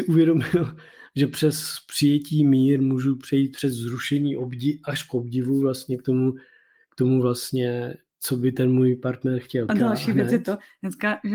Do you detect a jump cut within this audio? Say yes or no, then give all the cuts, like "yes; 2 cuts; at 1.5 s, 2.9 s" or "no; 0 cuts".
yes; 1 cut; at 9.7 s